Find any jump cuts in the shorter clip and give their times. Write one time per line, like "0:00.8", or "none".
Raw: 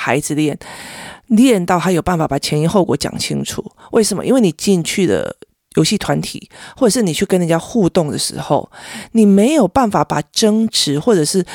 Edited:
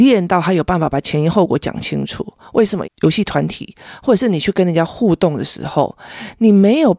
0:02.8